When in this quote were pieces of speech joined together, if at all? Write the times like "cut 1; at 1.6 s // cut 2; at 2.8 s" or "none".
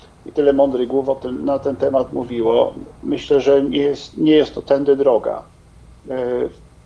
cut 1; at 3.4 s